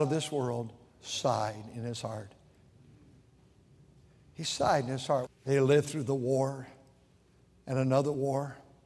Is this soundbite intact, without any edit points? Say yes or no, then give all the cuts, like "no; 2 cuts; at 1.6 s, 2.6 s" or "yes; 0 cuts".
no; 1 cut; at 5.3 s